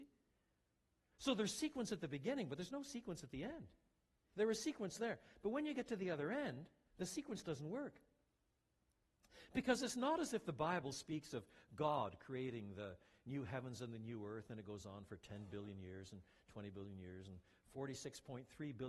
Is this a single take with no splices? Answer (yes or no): no